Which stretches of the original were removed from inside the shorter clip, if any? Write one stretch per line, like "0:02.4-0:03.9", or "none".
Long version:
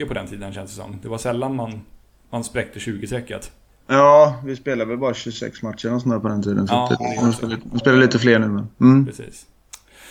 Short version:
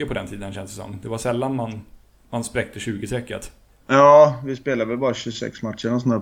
none